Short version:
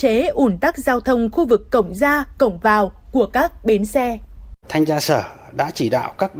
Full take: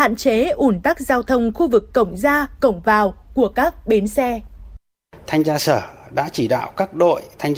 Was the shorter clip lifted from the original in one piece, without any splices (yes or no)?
no